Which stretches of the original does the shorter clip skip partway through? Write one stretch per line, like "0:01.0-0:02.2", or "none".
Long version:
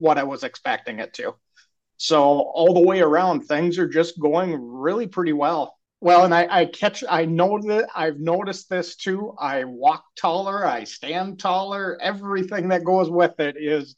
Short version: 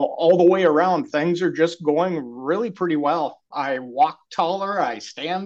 0:05.9-0:09.4